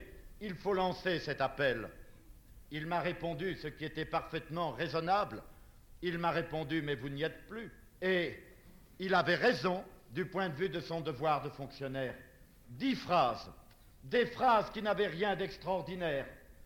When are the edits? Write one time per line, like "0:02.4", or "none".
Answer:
0:08.0
0:12.6